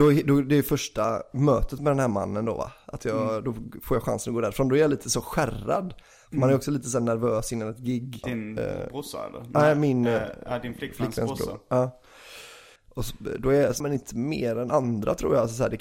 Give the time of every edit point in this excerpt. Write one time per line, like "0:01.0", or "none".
0:08.2
0:12.8
0:13.8